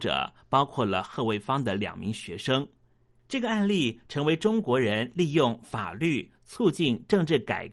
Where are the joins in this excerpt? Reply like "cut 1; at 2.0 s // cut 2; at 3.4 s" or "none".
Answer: none